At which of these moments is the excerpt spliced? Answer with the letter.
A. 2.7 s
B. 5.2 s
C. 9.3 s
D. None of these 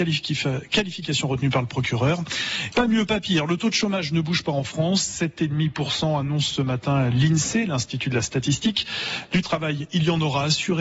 A